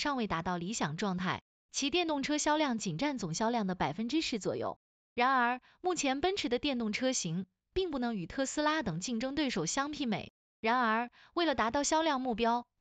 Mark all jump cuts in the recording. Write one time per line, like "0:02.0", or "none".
0:04.9
0:10.4